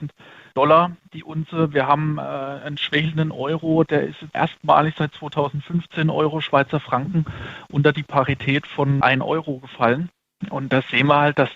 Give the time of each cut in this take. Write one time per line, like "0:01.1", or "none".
none